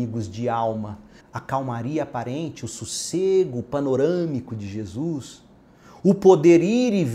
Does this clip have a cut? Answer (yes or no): yes